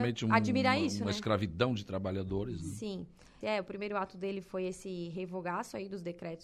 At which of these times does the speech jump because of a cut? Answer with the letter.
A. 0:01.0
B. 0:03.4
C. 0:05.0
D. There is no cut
B